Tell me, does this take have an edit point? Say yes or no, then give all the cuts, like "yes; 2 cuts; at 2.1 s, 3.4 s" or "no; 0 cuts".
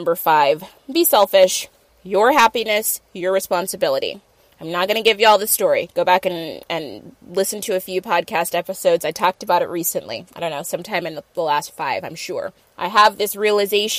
yes; 2 cuts; at 1.9 s, 12.6 s